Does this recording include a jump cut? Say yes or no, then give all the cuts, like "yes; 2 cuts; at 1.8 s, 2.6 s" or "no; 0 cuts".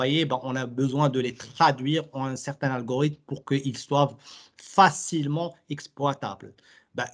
no; 0 cuts